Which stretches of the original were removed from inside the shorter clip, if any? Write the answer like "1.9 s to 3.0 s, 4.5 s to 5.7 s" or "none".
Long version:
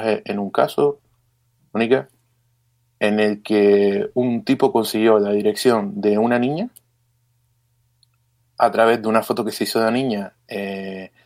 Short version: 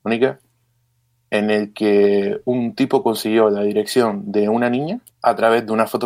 6.8 s to 8.5 s